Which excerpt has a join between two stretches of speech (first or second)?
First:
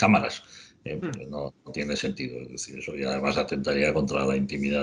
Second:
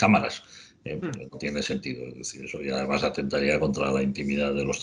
second